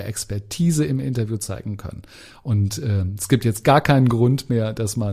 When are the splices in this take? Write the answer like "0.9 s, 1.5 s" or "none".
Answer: none